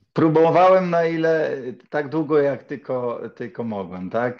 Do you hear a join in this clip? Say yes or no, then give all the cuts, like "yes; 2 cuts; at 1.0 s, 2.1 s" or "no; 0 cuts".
no; 0 cuts